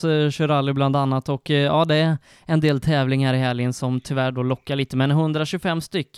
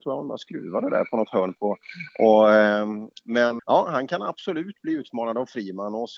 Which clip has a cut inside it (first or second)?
second